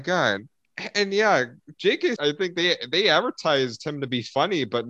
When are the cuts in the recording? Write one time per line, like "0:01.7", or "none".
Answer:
0:02.2